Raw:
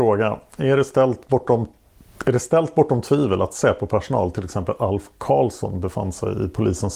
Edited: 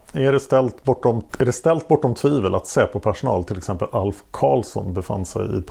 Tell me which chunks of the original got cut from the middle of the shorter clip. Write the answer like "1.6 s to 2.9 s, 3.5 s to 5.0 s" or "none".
1.7 s to 2.2 s